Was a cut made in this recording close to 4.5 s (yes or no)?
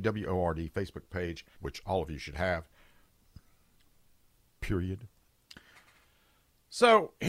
no